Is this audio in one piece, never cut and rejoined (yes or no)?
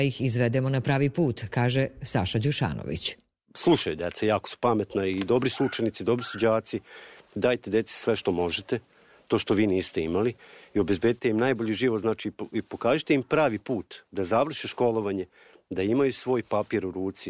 yes